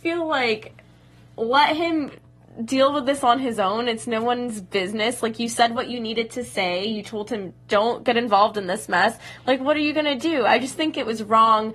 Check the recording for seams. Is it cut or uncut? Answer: cut